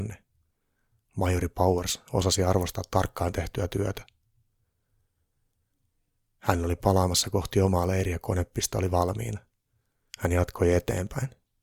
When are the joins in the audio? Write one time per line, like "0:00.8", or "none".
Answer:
0:10.1